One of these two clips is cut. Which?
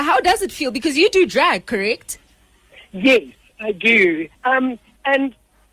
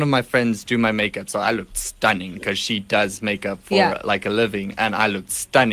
first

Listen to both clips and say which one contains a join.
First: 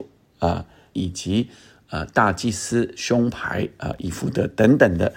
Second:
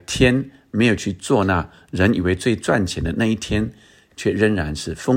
first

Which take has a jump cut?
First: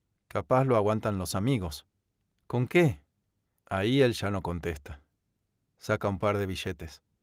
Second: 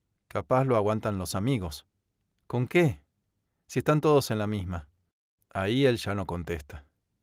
first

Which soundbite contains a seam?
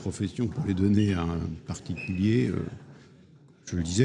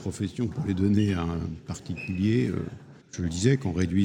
second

